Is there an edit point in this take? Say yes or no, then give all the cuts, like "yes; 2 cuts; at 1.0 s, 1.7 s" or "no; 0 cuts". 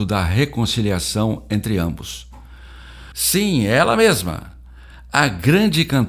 yes; 1 cut; at 3.1 s